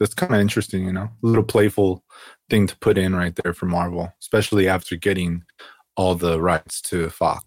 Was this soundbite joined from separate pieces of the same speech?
no; 0 cuts

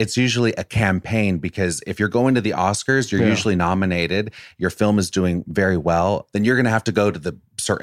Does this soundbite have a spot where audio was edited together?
yes; 1 cut; at 6.3 s

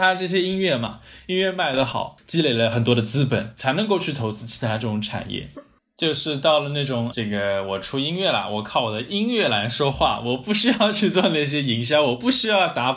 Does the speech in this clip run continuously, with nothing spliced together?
no; 2 cuts; at 5.5 s, 7.1 s

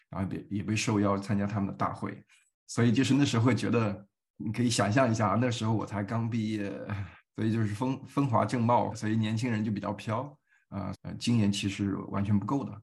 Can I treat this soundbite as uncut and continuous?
no; 3 cuts; at 7.2 s, 8.9 s, 10.9 s

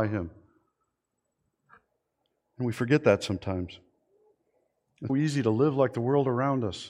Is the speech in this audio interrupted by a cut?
yes; 1 cut; at 5.1 s

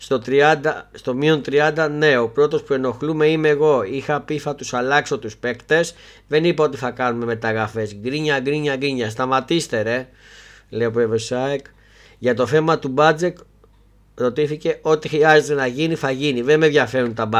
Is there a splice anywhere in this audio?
yes; 1 cut; at 0.9 s

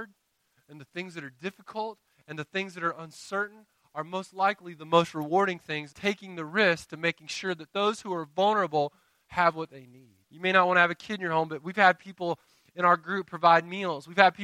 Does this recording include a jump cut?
yes; 2 cuts; at 5.9 s, 10.2 s

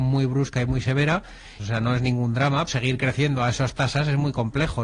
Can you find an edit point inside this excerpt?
yes; 2 cuts; at 1.6 s, 2.7 s

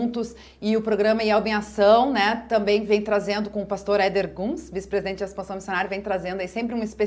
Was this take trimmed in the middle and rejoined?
no; 0 cuts

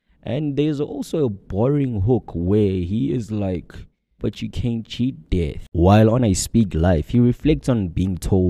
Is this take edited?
yes; 1 cut; at 4.2 s

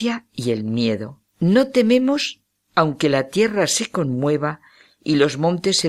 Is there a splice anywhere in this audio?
yes; 1 cut; at 1.3 s

